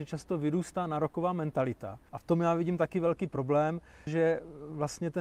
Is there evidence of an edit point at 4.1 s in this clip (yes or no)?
yes